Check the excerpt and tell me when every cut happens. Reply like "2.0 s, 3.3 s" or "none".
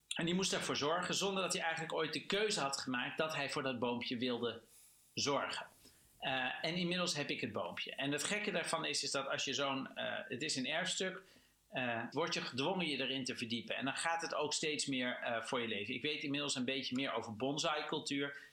12.1 s